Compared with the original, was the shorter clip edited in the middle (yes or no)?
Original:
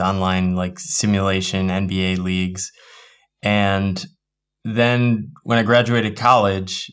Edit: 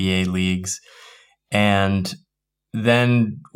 no